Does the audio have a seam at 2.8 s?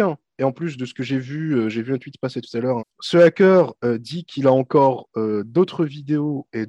yes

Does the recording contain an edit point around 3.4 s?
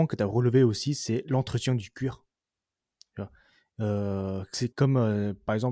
no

